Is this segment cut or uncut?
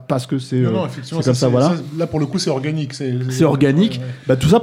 uncut